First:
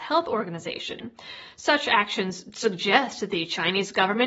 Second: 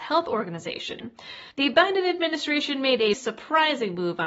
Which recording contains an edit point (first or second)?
second